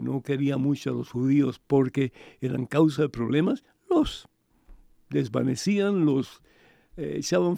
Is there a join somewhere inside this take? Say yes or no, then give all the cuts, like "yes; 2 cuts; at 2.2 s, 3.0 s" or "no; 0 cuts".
no; 0 cuts